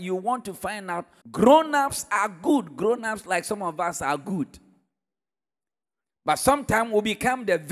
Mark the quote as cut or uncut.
cut